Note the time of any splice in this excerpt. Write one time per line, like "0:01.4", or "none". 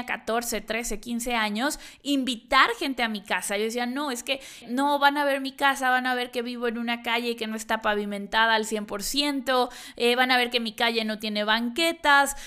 0:04.6